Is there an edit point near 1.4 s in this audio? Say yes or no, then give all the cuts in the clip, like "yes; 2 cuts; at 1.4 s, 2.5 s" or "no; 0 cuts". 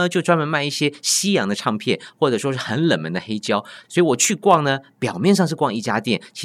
no; 1 cut; at 3.8 s